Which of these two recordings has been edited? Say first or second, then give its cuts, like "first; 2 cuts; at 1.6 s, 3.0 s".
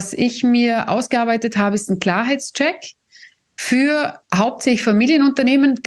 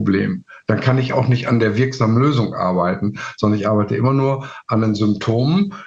first; 1 cut; at 4.2 s